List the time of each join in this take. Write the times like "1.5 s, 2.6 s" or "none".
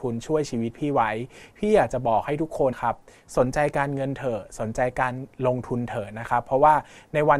2.7 s